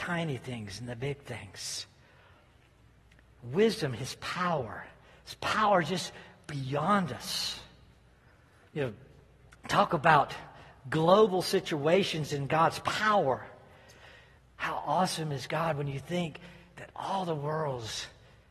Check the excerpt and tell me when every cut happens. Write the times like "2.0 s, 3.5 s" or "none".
14.4 s